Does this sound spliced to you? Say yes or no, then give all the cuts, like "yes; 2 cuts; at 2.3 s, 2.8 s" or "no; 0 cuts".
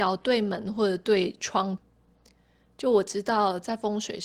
no; 0 cuts